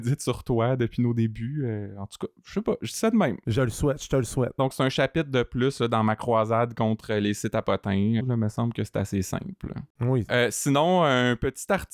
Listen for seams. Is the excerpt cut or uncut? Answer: cut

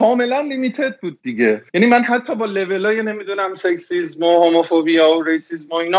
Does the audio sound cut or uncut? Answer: cut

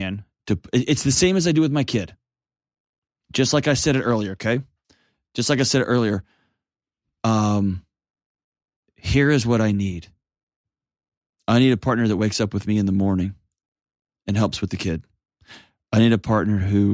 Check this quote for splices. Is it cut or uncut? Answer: uncut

